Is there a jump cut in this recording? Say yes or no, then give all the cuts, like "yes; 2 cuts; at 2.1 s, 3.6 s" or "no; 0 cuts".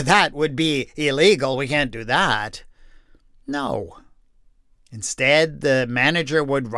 no; 0 cuts